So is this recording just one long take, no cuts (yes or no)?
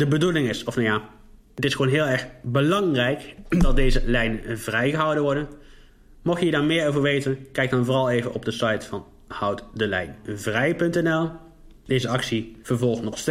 yes